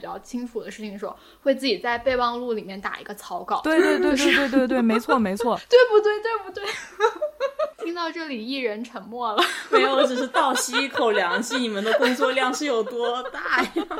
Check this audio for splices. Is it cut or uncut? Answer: uncut